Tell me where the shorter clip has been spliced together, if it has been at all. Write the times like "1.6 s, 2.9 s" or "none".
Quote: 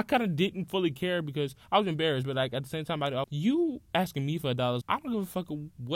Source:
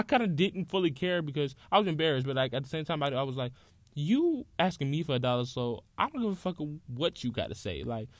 3.2 s, 4.8 s